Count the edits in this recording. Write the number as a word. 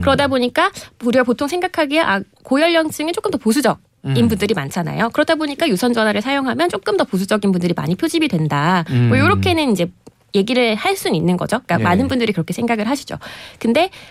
one